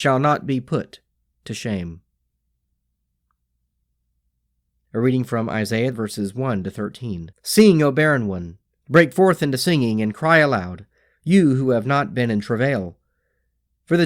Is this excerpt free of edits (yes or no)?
no